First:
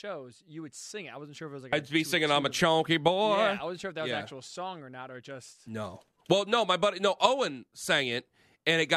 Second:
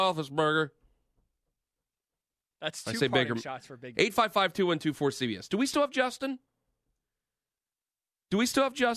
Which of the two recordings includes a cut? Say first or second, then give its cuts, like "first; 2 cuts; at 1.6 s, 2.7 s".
second; 1 cut; at 3.9 s